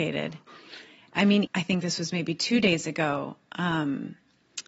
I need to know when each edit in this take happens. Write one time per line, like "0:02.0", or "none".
0:01.4